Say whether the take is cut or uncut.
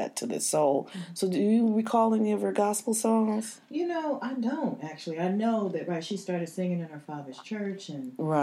uncut